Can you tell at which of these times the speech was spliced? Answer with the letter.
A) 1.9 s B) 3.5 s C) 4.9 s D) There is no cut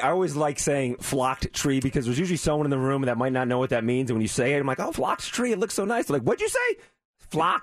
C